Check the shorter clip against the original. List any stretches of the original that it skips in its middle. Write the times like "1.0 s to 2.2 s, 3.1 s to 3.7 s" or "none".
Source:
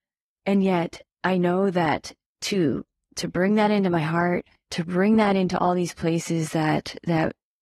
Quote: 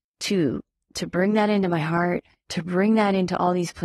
none